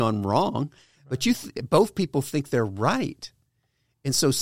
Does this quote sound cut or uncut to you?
uncut